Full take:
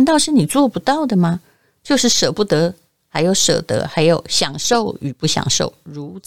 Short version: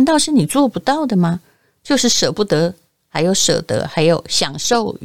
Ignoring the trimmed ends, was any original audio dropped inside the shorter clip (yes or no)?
no